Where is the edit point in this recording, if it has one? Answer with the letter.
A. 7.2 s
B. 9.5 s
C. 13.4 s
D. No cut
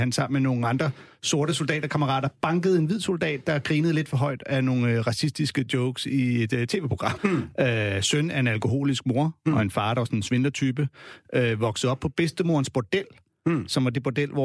A